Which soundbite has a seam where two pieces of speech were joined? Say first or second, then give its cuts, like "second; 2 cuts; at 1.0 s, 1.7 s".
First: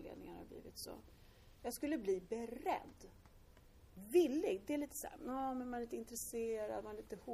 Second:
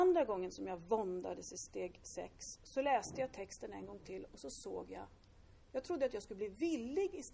first; 2 cuts; at 1.5 s, 3.9 s